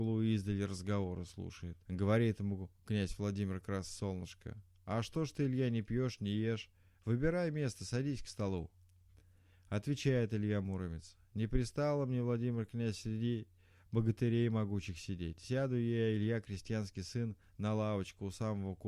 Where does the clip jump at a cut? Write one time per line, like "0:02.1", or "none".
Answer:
0:01.8